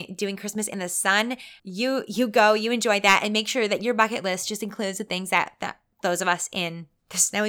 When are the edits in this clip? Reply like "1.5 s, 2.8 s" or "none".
1.6 s